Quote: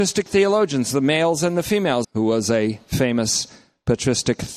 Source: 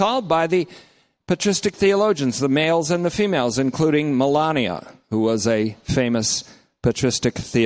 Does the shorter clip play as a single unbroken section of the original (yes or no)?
no